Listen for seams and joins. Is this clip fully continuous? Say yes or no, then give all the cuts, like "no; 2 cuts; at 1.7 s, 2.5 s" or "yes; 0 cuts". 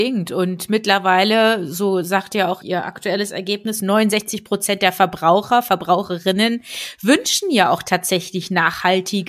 no; 1 cut; at 2.6 s